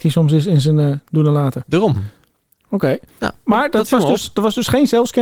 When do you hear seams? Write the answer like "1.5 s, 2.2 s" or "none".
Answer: none